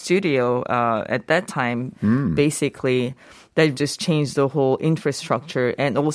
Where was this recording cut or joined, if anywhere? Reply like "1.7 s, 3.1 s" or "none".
1.9 s, 3.7 s